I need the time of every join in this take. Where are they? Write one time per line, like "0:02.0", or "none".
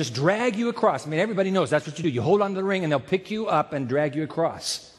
none